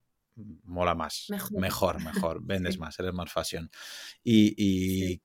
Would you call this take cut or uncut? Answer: uncut